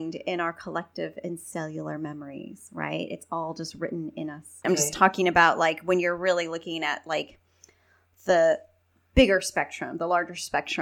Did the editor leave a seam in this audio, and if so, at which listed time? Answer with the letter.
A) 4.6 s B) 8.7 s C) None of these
A